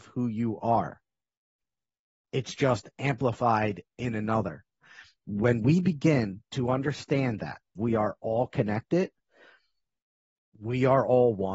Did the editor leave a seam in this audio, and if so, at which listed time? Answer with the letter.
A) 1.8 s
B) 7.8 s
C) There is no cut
B